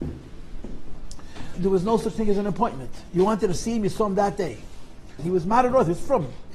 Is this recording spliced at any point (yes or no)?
yes